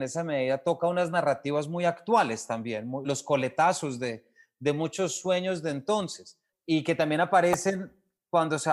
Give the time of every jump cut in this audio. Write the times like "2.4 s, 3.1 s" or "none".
3.0 s, 6.5 s